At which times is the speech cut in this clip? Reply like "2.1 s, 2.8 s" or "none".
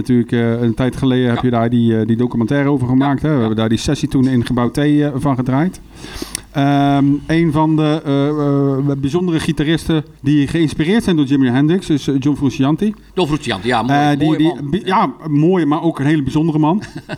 10.2 s